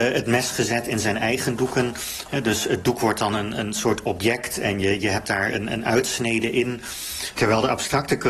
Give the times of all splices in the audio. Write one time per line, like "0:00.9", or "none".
0:07.3